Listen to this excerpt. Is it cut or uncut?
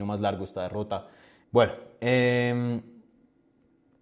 cut